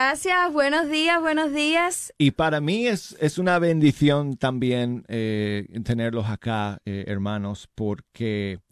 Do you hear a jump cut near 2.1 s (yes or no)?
yes